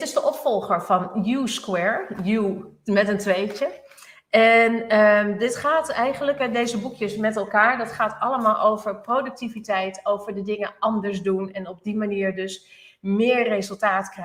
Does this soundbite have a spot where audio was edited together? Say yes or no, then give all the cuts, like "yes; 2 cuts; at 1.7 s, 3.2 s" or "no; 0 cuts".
no; 0 cuts